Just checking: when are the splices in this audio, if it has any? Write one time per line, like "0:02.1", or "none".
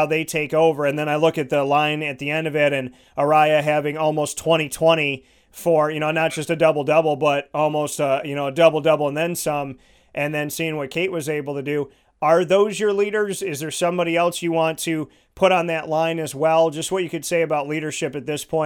none